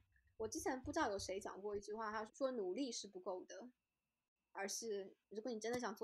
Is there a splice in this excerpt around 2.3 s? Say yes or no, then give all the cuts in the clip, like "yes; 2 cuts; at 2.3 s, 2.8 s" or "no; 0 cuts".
yes; 1 cut; at 2.3 s